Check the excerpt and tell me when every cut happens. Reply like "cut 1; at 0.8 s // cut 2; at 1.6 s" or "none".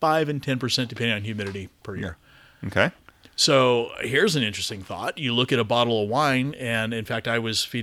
none